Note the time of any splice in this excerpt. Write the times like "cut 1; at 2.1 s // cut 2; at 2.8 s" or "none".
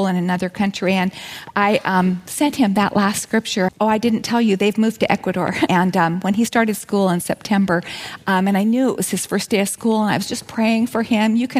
cut 1; at 3.7 s // cut 2; at 5.7 s